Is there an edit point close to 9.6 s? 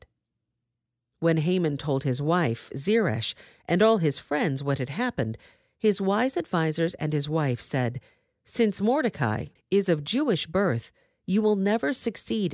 yes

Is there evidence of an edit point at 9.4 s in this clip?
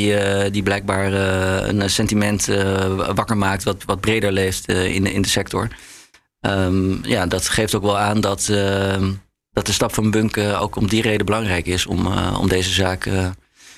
no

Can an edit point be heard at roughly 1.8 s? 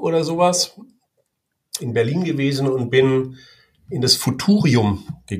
yes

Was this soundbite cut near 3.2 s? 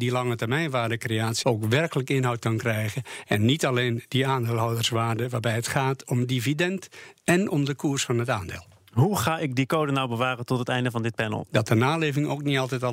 no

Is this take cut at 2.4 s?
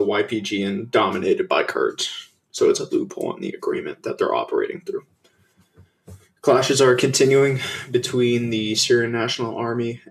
no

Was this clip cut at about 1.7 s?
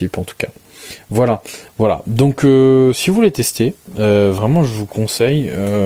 yes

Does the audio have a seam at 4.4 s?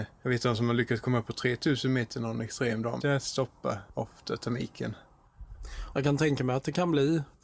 no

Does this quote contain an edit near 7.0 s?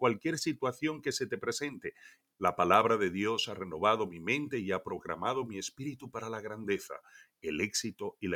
no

